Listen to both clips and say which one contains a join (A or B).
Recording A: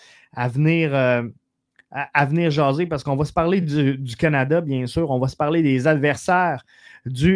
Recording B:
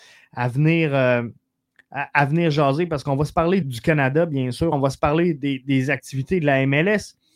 B